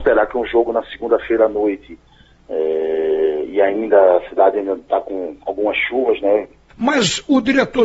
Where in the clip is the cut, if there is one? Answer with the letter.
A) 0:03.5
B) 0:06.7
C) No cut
B